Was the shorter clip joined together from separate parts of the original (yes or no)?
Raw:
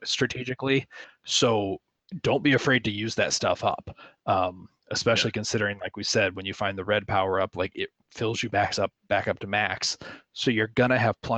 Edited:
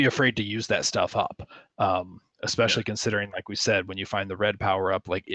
no